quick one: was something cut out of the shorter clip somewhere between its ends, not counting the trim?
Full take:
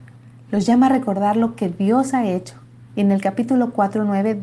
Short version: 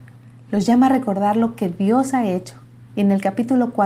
no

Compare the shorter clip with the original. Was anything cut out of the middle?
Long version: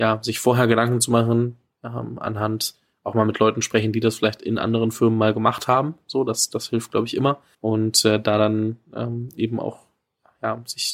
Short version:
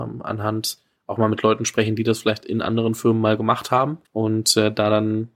yes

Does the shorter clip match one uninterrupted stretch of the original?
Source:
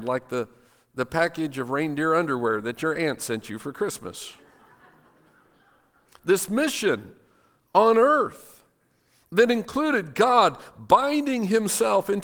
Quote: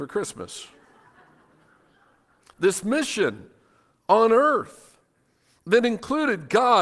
yes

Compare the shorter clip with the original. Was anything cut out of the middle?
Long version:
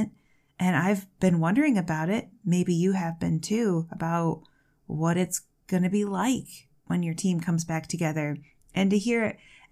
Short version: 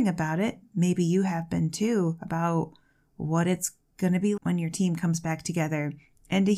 yes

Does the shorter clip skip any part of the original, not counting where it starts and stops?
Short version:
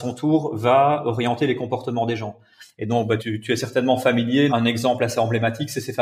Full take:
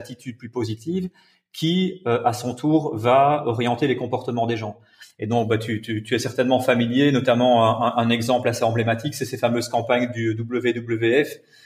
yes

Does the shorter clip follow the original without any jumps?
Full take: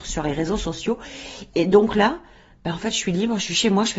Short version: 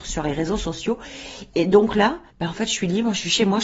no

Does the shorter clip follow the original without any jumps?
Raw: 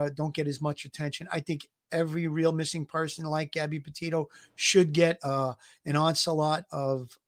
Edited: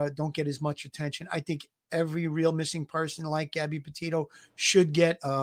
yes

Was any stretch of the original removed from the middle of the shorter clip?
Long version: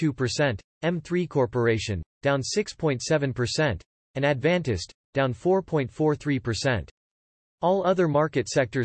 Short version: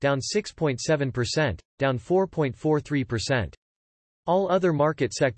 yes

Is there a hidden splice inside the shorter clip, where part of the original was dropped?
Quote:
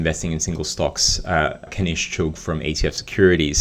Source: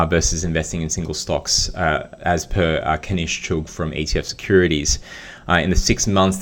yes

